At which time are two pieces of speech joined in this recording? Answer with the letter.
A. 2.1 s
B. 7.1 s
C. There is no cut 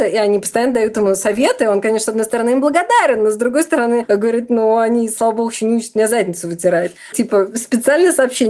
B